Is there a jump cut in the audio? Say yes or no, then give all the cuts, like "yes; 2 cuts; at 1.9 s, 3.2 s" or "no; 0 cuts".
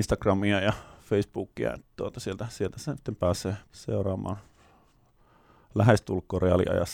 yes; 1 cut; at 3.7 s